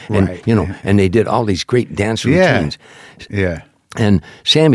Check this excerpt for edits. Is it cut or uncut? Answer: cut